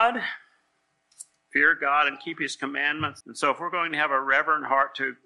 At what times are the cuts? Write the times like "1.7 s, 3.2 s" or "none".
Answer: 3.2 s

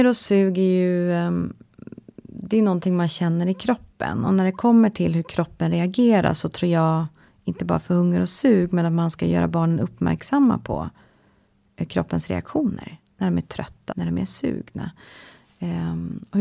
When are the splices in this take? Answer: 13.9 s

